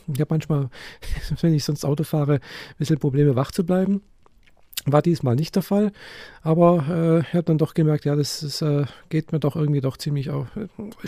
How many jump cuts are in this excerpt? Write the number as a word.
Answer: zero